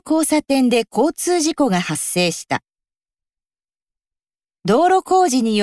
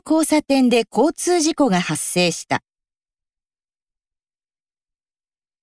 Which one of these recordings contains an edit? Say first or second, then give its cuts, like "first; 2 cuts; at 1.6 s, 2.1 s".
first; 1 cut; at 4.6 s